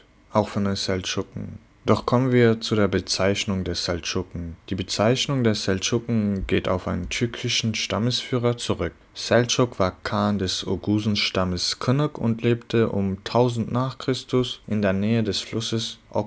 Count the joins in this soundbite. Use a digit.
0